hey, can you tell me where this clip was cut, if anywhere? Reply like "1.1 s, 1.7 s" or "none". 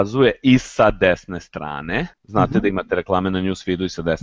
2.1 s